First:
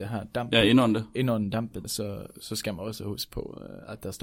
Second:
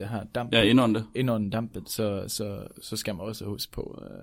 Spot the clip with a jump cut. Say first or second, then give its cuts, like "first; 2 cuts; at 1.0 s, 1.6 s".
first; 1 cut; at 1.8 s